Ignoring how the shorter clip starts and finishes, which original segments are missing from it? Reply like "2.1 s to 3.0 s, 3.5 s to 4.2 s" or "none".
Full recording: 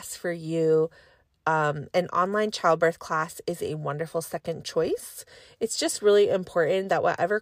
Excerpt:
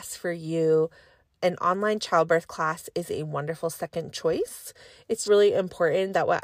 1.4 s to 1.9 s, 5.8 s to 6.0 s